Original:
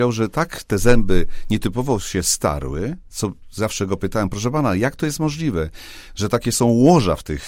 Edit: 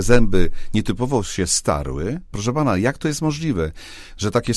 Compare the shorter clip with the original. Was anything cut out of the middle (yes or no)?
yes